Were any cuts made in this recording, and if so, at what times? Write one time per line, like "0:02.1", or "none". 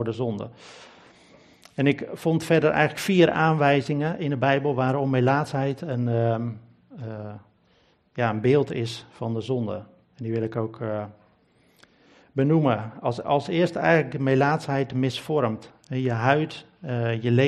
none